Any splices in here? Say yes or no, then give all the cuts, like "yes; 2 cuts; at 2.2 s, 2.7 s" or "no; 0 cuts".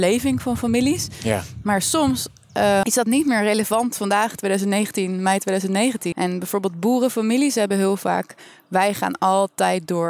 yes; 2 cuts; at 2.8 s, 6.1 s